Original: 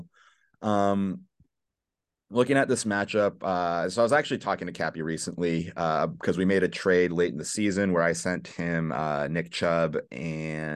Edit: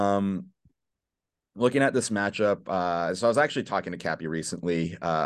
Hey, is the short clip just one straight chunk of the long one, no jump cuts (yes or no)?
yes